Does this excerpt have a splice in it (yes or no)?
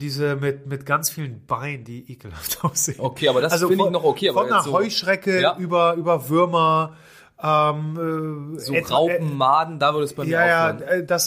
no